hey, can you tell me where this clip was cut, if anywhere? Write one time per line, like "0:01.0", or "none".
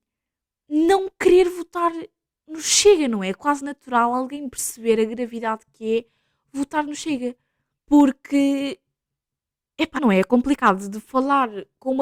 0:07.8
0:10.0